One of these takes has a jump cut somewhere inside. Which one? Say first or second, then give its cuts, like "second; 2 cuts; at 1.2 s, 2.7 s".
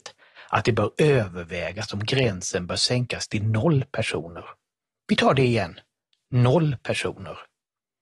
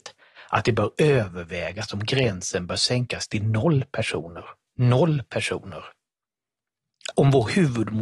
second; 2 cuts; at 4.7 s, 7.1 s